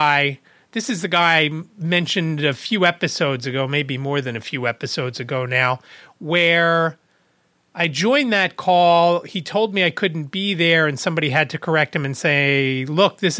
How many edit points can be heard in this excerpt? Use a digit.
0